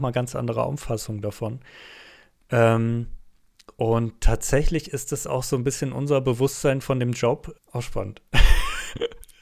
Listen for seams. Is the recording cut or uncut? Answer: cut